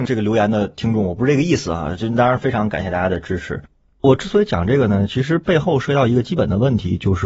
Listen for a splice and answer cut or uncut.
uncut